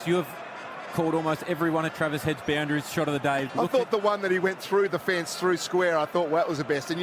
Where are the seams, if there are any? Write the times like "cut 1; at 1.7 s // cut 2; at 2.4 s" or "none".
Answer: cut 1; at 3.5 s